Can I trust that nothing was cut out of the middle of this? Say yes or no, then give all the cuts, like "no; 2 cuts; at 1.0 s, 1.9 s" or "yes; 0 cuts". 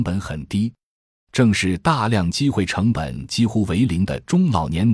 yes; 0 cuts